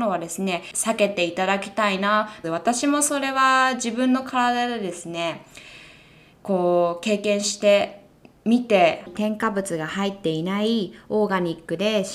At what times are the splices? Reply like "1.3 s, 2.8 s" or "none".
2.4 s